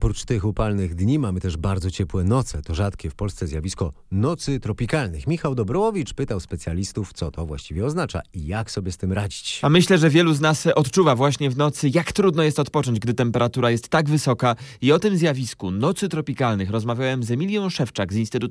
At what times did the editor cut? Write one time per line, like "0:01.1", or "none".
none

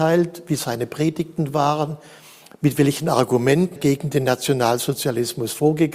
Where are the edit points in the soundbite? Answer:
0:03.8

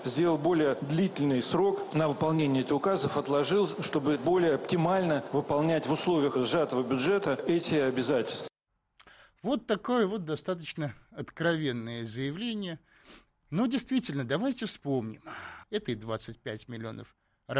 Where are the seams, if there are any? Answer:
0:15.6

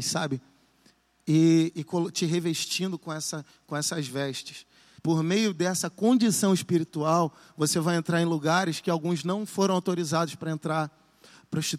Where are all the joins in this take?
0:05.0

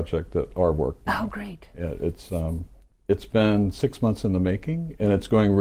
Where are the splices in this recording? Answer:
none

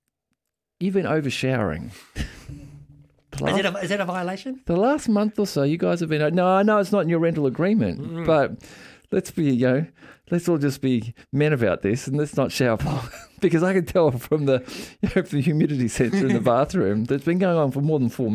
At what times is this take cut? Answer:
0:12.8

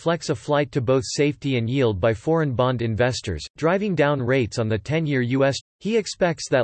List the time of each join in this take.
0:05.6

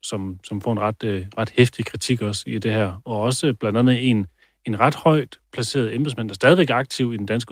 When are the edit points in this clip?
none

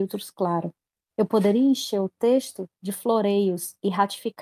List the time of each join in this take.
0:01.1

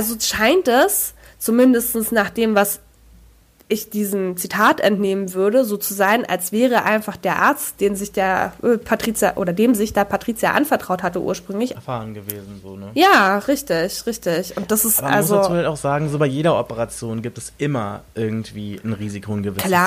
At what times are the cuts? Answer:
0:11.7

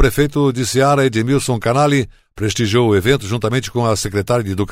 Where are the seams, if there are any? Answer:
none

